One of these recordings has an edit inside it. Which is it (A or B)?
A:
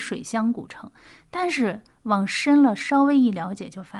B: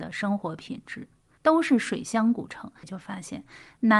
B